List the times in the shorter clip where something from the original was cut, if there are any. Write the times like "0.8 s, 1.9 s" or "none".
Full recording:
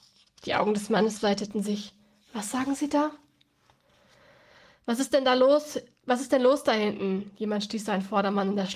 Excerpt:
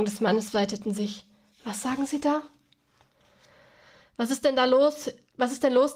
none